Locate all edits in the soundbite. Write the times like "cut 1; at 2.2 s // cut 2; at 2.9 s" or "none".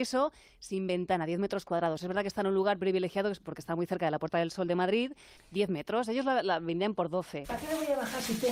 cut 1; at 5.4 s // cut 2; at 7.4 s